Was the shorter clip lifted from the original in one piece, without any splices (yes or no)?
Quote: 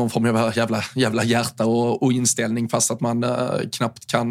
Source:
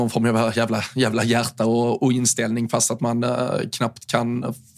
yes